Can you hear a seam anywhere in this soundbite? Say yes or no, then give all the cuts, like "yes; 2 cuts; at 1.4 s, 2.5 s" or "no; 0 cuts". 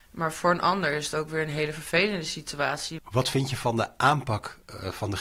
yes; 1 cut; at 3.0 s